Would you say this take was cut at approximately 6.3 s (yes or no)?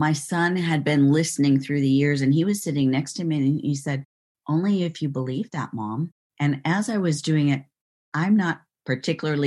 yes